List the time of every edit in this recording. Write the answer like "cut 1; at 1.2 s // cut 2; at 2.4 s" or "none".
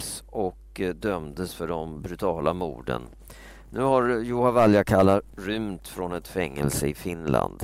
none